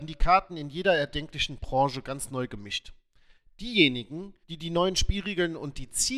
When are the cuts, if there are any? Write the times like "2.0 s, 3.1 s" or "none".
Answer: 4.4 s